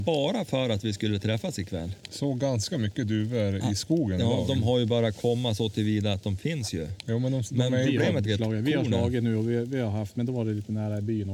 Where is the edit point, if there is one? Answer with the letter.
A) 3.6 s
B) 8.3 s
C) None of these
B